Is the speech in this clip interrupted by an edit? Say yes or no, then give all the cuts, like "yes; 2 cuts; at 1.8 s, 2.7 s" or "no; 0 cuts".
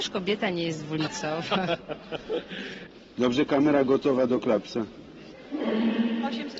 no; 0 cuts